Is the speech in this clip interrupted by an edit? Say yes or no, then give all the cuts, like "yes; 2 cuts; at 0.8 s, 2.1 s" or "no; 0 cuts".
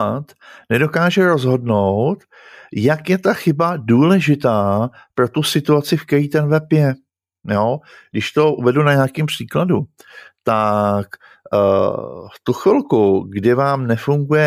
no; 0 cuts